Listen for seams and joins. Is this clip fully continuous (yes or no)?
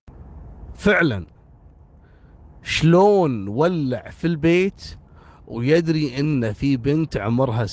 yes